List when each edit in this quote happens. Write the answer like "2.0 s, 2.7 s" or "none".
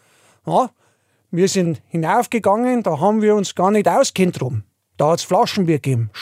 none